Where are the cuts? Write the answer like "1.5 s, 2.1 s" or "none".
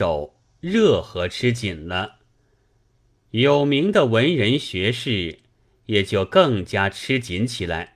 none